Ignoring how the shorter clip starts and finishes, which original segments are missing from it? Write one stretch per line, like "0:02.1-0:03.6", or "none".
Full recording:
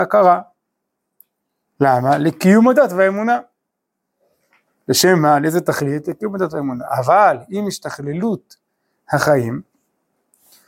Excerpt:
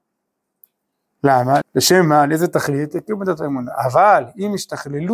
0:02.2-0:04.7